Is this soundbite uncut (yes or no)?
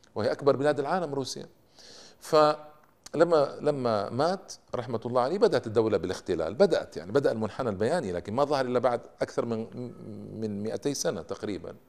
yes